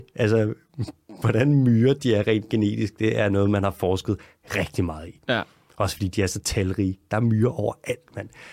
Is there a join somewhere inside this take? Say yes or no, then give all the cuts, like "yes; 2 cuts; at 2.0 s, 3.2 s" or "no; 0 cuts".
no; 0 cuts